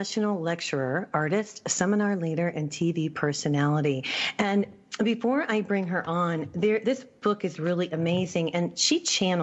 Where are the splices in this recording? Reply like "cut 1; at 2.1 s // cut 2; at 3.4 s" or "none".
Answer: none